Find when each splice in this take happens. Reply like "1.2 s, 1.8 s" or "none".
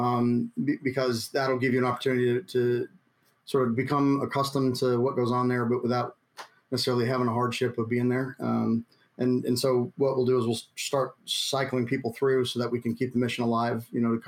none